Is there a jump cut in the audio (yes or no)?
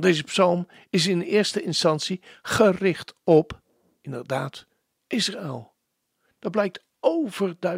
no